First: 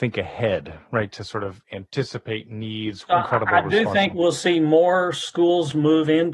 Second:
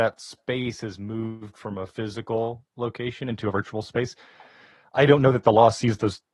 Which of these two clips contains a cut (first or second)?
first